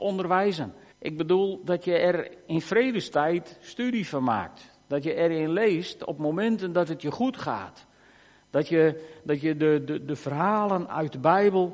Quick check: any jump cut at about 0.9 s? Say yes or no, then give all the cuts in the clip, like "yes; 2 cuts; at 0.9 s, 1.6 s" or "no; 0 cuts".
yes; 1 cut; at 0.9 s